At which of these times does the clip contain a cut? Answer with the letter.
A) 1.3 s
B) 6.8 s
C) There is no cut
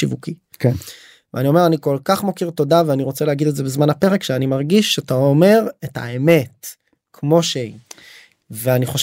C